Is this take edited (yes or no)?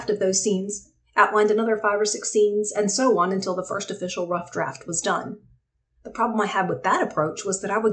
no